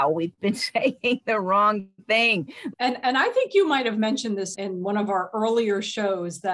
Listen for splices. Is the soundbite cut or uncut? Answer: cut